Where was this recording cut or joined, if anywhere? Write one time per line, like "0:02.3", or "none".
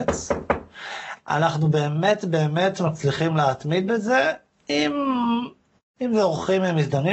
0:05.8